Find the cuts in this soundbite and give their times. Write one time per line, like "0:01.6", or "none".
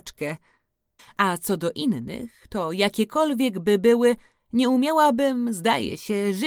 0:01.0